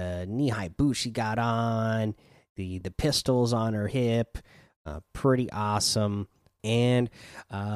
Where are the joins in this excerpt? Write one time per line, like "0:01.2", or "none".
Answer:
0:02.8
0:06.6